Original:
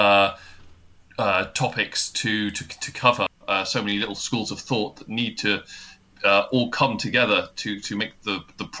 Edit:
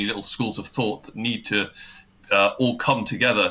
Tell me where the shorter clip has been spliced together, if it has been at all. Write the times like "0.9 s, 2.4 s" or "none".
none